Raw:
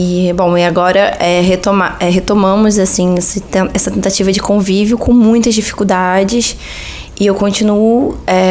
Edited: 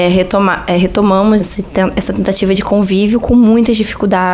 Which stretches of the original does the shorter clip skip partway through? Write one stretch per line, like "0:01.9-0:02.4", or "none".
0:02.7-0:03.2